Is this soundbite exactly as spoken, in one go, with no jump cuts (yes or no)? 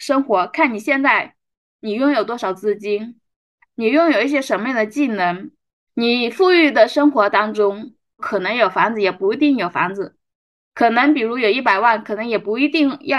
no